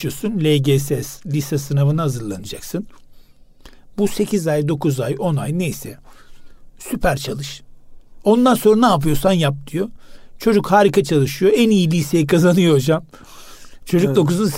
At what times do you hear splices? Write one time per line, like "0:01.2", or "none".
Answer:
none